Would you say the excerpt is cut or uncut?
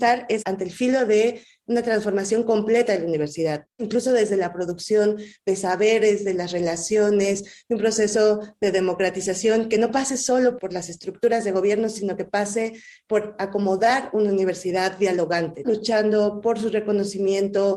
cut